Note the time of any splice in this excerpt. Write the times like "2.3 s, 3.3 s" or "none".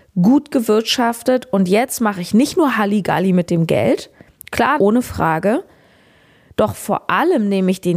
4.8 s